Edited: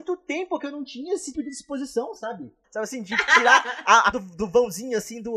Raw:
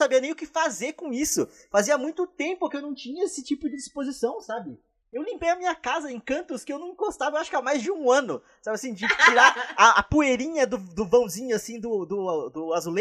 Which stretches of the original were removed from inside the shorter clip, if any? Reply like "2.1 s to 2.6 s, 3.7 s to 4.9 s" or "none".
3.4 s to 3.6 s, 4.9 s to 8.6 s, 10.0 s to 10.7 s

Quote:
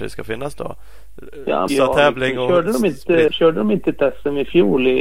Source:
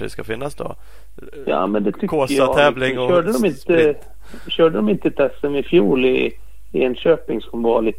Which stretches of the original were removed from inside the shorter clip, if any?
1.7 s to 2.3 s, 3.9 s to 4.5 s

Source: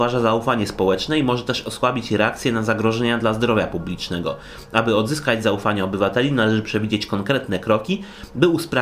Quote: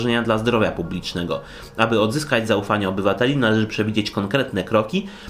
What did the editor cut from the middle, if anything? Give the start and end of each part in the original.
none

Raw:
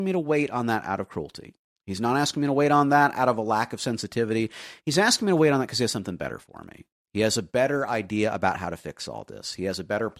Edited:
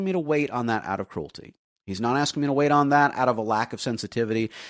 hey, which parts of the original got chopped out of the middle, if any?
none

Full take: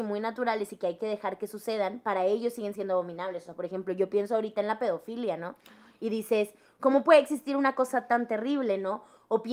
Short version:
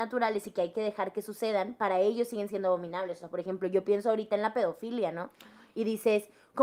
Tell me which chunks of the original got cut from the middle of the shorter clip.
none

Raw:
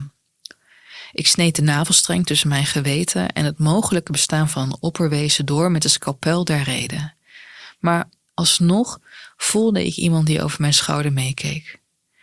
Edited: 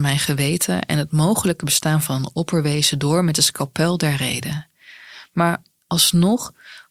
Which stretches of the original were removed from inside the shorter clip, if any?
none

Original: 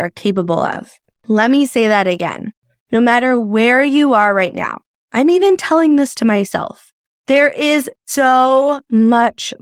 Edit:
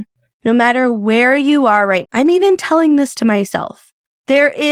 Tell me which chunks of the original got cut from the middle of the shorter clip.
4.5 s to 5.0 s

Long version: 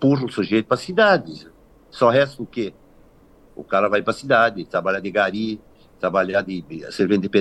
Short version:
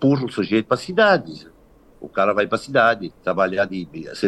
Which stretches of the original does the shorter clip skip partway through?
1.9 s to 3.4 s, 4.7 s to 5.9 s

